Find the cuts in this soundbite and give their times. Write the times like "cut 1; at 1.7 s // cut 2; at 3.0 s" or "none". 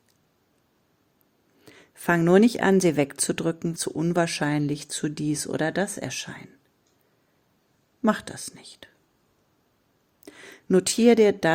cut 1; at 3.8 s